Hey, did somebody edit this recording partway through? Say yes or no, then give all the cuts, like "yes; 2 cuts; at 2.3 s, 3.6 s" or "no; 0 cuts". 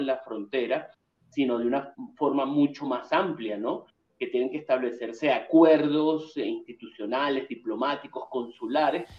no; 0 cuts